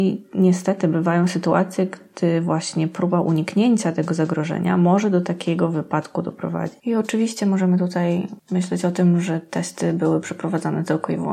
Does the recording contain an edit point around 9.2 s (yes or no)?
no